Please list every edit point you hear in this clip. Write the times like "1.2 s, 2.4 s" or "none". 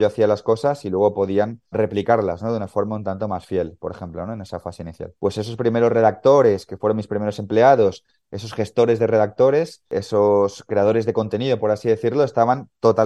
1.7 s, 5.2 s